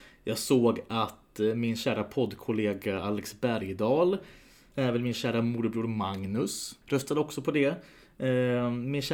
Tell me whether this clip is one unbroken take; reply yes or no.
no